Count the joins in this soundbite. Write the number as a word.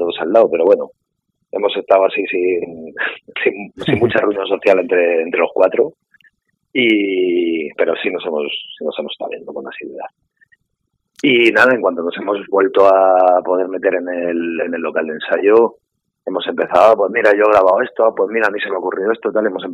zero